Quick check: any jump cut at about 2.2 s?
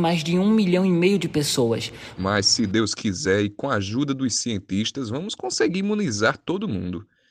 yes; 1 cut; at 2.2 s

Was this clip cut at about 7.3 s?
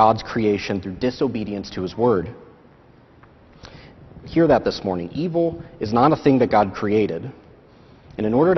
no; 1 cut; at 4.2 s

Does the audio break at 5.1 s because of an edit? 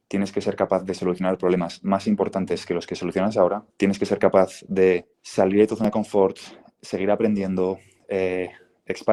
yes; 2 cuts; at 3.7 s, 5.1 s

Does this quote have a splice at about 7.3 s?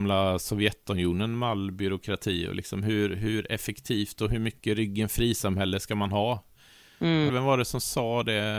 yes; 1 cut; at 7.3 s

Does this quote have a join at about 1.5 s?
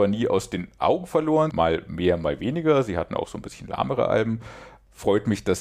yes; 1 cut; at 1.5 s

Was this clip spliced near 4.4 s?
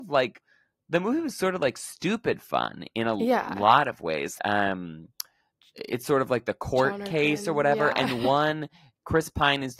yes; 1 cut; at 4.4 s

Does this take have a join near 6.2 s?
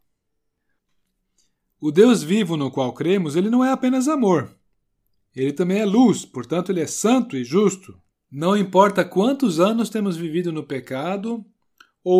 no; 1 cut; at 8.1 s

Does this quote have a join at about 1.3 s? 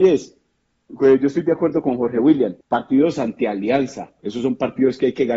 no; 2 cuts; at 2.6 s, 4.2 s

